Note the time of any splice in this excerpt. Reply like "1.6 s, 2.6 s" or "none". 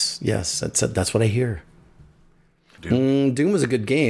2.8 s